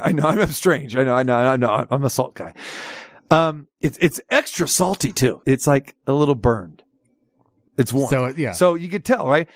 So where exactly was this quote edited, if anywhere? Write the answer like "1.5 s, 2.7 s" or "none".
5.4 s, 7.7 s